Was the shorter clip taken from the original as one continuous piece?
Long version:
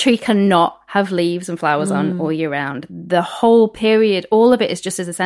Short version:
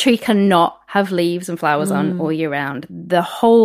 yes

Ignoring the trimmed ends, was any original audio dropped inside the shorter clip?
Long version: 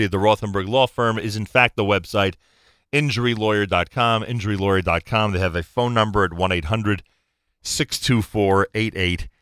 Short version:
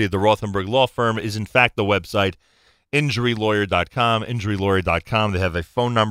no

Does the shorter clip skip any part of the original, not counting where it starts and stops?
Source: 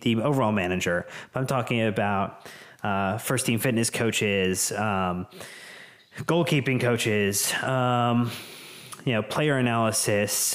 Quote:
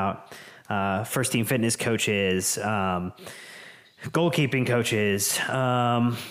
no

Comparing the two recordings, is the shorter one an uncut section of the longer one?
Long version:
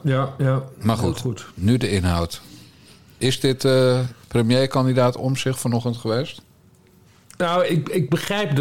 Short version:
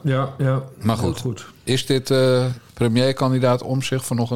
no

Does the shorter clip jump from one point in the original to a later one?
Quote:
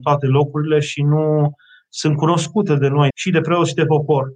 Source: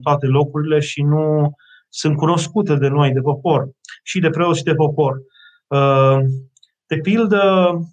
yes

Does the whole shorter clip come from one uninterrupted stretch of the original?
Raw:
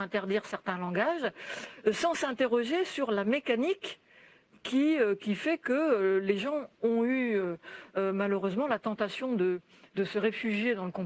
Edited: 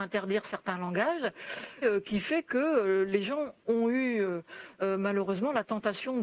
no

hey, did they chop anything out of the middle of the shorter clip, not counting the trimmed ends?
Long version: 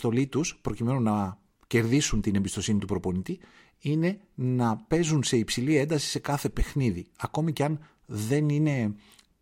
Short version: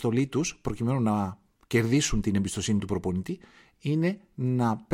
no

